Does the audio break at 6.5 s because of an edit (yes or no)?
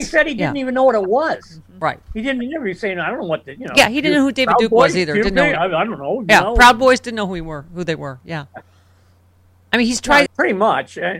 no